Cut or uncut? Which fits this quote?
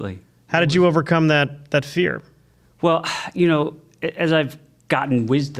uncut